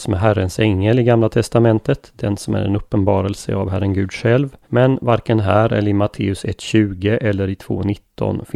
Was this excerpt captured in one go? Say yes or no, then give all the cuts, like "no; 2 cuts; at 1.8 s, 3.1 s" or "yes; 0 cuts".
no; 1 cut; at 4.6 s